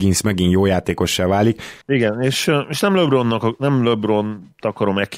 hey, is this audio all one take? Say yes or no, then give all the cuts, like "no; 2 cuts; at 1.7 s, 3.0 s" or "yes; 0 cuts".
no; 1 cut; at 1.8 s